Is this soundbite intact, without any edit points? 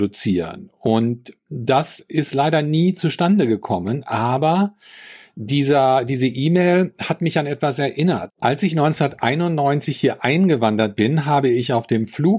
yes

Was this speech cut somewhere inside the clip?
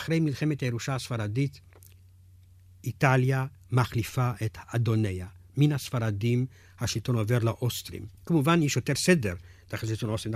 yes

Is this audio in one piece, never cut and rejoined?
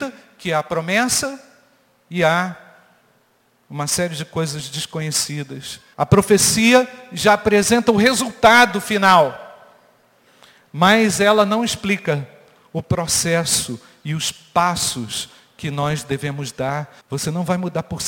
no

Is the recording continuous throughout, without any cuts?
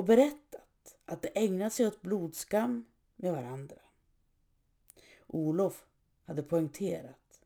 yes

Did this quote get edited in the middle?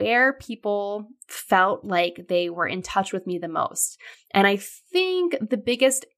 no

